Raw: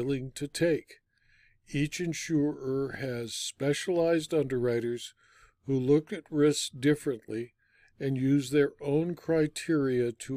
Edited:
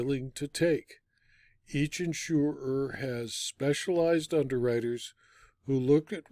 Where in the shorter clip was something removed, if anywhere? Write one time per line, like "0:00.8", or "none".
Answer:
none